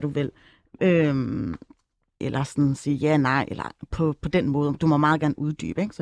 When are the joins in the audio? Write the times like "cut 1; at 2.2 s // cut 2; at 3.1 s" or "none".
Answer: cut 1; at 2.2 s